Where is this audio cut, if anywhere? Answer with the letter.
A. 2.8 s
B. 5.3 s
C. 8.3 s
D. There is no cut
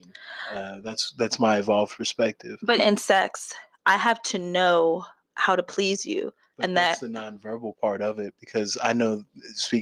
A